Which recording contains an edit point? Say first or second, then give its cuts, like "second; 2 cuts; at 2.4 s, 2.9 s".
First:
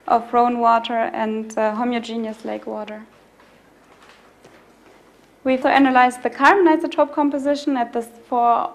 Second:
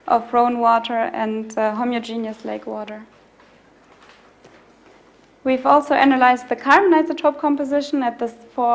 first; 1 cut; at 5.6 s